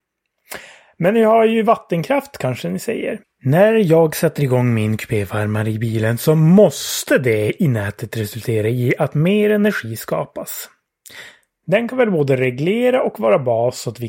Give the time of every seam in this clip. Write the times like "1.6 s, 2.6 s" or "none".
3.2 s, 11.6 s